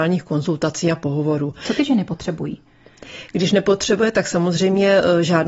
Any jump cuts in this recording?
no; 0 cuts

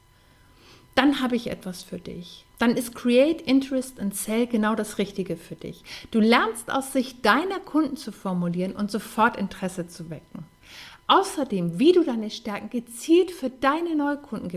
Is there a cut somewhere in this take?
yes; 1 cut; at 2.5 s

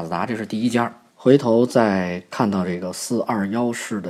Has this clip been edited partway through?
yes; 1 cut; at 1.1 s

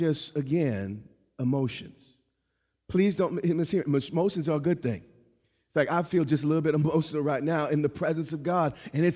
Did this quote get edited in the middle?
no; 0 cuts

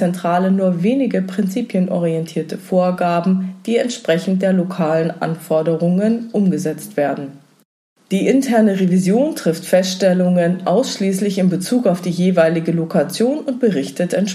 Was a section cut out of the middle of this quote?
no; 0 cuts

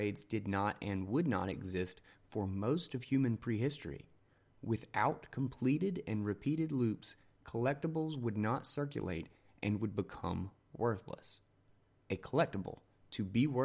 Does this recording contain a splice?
no; 0 cuts

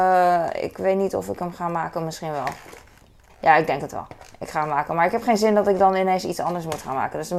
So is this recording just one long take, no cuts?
no; 1 cut; at 3.3 s

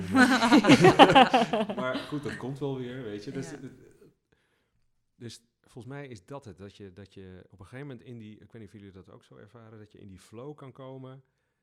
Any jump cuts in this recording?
no; 0 cuts

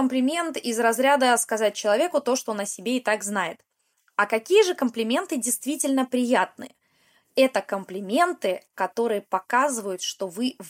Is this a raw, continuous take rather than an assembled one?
yes; 0 cuts

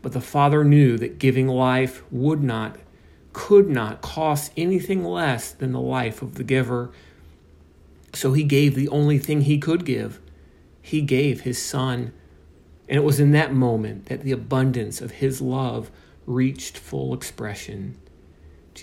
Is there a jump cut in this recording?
yes; 1 cut; at 12.8 s

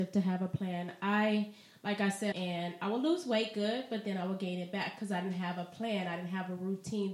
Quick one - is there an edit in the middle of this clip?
yes; 1 cut; at 2.3 s

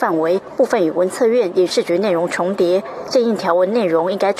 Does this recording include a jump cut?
no; 0 cuts

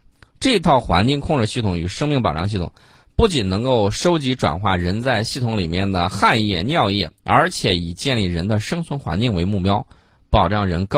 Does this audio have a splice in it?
yes; 1 cut; at 7.2 s

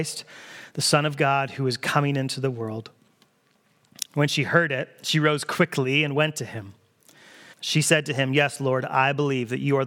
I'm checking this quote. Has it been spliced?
yes; 2 cuts; at 4.1 s, 7.5 s

